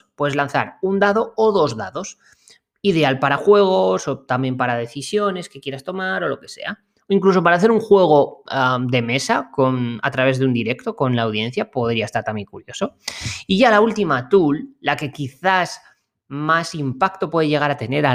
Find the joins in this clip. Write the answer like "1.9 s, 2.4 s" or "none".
none